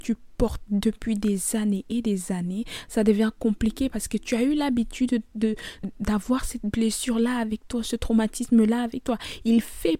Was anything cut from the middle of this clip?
yes; 1 cut; at 5.8 s

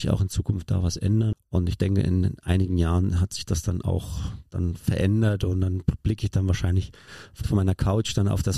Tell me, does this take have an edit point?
yes; 2 cuts; at 1.3 s, 7.4 s

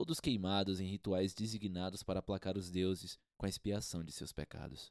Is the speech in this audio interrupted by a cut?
no; 0 cuts

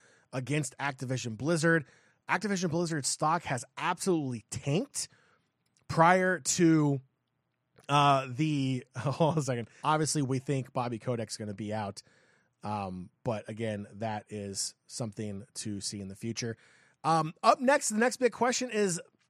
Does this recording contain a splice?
yes; 1 cut; at 9.8 s

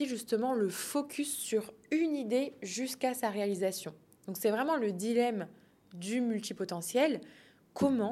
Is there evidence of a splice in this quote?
no; 0 cuts

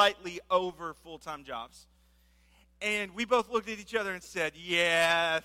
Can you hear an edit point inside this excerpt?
no; 0 cuts

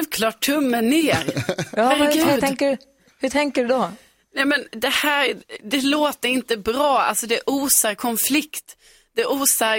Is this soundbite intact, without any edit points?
yes; 0 cuts

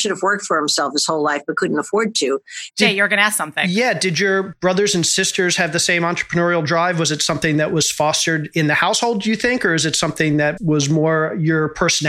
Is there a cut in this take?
yes; 2 cuts; at 2.7 s, 10.6 s

